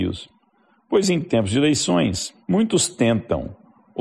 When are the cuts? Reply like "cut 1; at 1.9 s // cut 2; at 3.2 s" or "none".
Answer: cut 1; at 2.4 s